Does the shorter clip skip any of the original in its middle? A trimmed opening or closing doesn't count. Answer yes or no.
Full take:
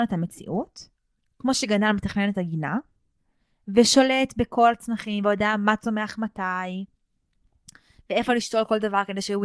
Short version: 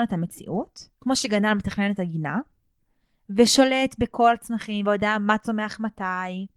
yes